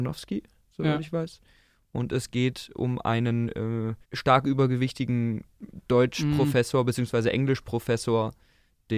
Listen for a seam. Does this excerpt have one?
yes; 1 cut; at 4.0 s

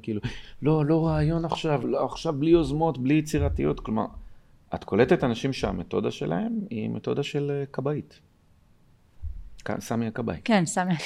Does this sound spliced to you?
yes; 1 cut; at 1.8 s

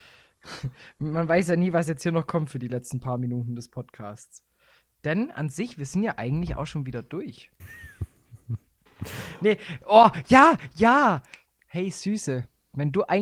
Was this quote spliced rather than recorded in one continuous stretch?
yes; 1 cut; at 7.6 s

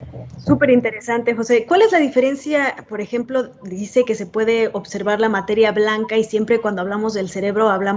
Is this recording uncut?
yes; 0 cuts

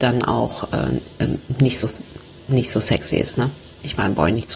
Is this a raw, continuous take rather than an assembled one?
yes; 0 cuts

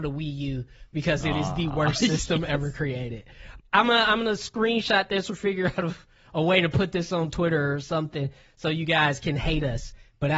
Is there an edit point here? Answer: yes; 1 cut; at 3.6 s

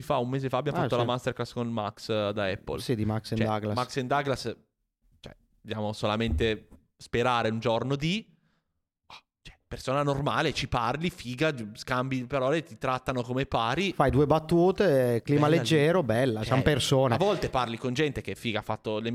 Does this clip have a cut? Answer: no; 0 cuts

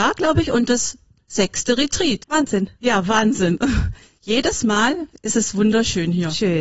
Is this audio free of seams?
no; 1 cut; at 2.2 s

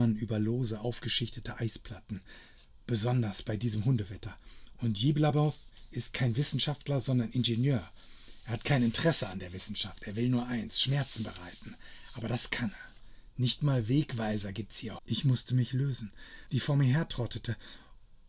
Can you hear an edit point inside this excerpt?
yes; 2 cuts; at 15.0 s, 16.5 s

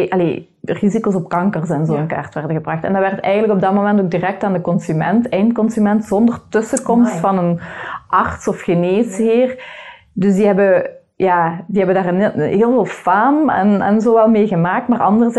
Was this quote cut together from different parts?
no; 0 cuts

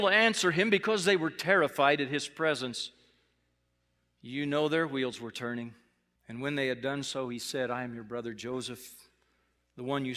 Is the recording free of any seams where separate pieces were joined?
no; 1 cut; at 6.2 s

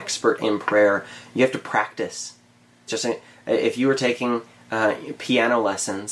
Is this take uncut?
no; 1 cut; at 2.9 s

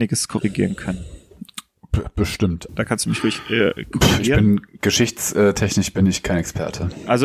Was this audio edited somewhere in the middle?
yes; 1 cut; at 2.7 s

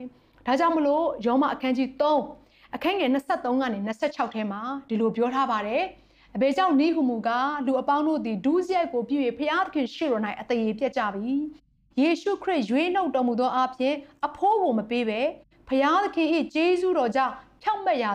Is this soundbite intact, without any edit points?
yes; 0 cuts

